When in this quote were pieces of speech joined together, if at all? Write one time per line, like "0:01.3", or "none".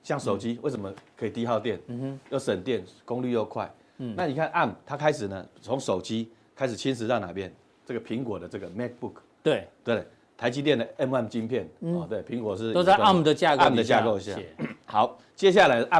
none

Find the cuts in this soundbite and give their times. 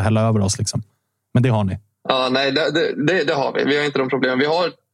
none

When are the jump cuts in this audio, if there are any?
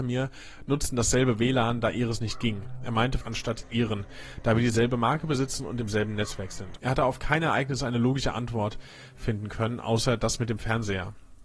0:03.2
0:06.8

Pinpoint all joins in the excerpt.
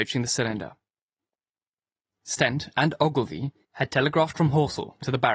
0:02.0
0:03.6

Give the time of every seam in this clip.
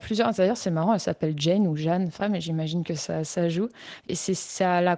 0:02.2
0:04.0

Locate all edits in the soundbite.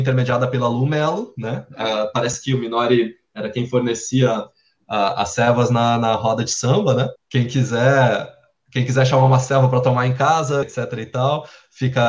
0:07.2
0:10.6

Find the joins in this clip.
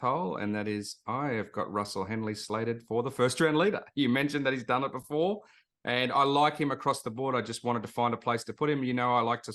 none

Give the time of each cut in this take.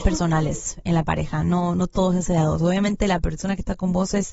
none

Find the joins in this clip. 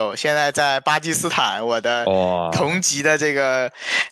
none

